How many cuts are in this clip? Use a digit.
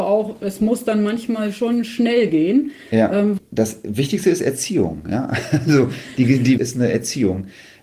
2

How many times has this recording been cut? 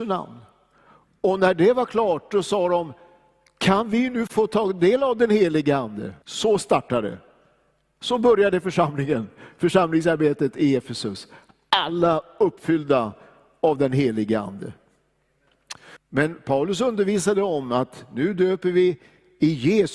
2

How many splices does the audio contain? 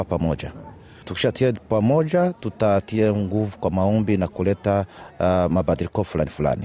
1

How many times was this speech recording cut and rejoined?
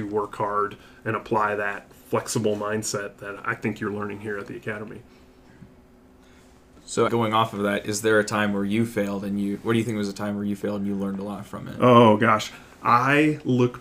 1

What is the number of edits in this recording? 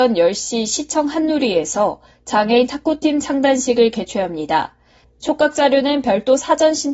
1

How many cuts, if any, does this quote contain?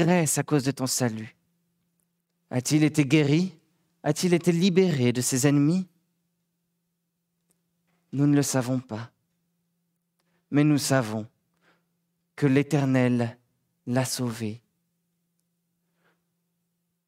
1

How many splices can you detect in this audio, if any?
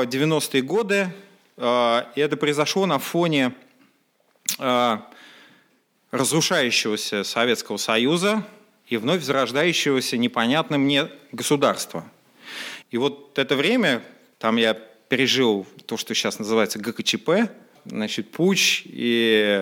3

